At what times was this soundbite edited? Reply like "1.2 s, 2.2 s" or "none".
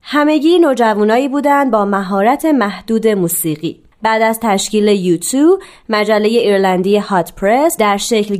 3.9 s